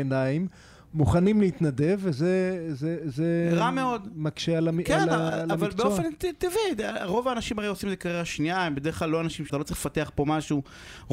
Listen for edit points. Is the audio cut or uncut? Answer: cut